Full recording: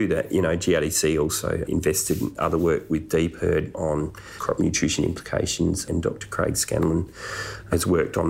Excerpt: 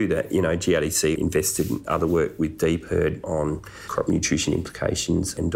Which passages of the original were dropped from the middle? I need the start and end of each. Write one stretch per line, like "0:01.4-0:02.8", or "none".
0:01.1-0:01.7

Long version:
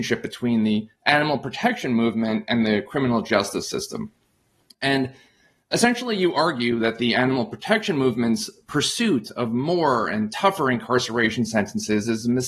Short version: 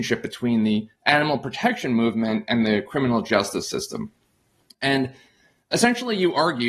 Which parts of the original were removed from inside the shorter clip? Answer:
none

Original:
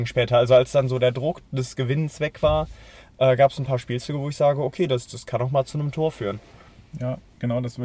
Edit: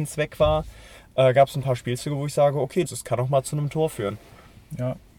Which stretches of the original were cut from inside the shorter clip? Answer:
0:04.9-0:05.1

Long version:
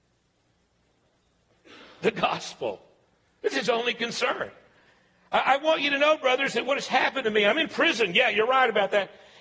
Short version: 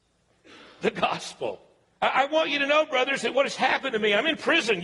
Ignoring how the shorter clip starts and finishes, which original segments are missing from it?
0:03.2-0:05.3

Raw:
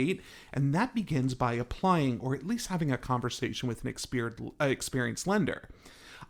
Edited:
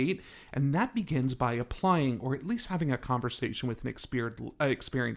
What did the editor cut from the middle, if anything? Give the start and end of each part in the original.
none

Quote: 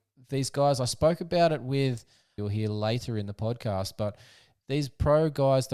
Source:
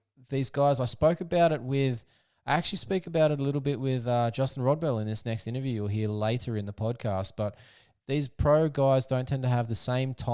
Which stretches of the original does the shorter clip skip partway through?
0:02.4-0:05.8

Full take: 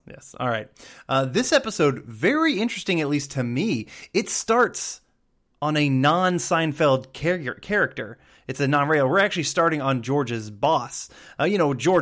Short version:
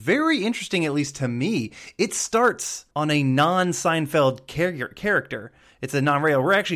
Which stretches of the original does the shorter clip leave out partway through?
0:05.1-0:05.6

